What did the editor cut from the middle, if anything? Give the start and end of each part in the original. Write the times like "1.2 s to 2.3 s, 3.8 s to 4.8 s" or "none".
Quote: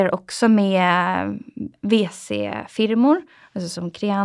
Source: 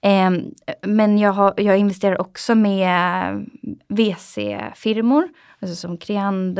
none